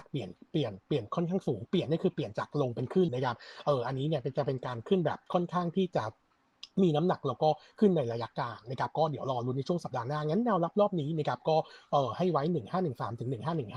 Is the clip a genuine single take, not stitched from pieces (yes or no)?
no